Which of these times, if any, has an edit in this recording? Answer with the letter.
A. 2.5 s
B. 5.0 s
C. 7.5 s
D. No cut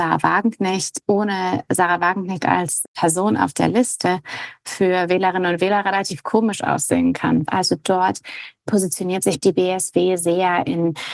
C